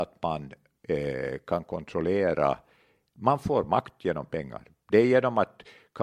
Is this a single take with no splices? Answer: yes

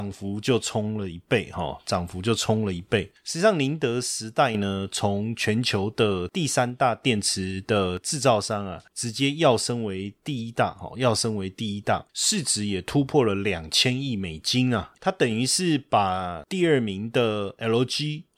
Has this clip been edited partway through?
no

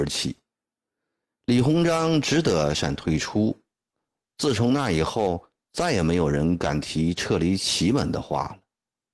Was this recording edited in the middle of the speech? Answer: yes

